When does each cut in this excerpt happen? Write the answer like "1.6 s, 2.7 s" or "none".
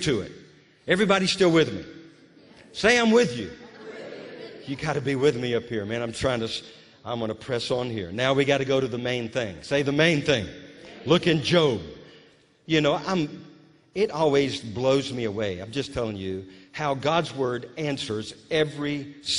none